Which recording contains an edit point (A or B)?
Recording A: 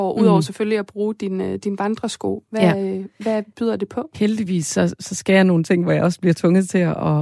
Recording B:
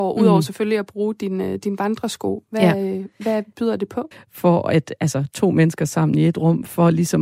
B